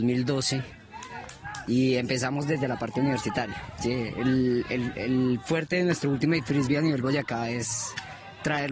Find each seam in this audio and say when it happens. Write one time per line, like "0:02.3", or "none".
none